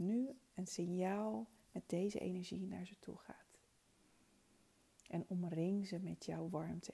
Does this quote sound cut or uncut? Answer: uncut